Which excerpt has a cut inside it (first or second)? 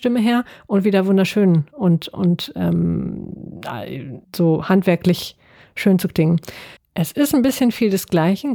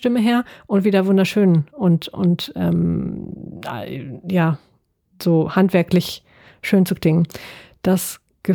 first